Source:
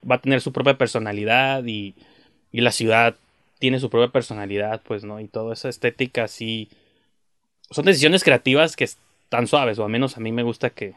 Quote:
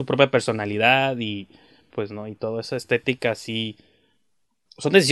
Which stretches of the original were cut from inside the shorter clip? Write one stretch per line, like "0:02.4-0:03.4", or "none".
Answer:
0:02.4-0:04.8